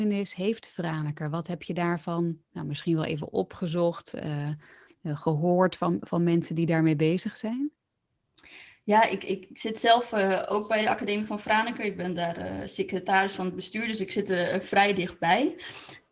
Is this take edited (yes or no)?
no